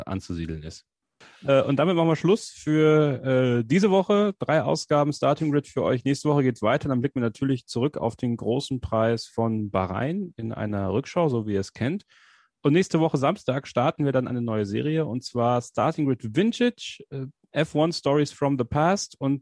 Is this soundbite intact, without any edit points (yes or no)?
yes